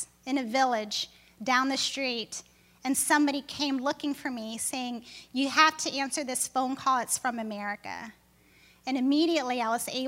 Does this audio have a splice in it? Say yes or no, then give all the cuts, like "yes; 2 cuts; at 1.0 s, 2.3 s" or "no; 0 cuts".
no; 0 cuts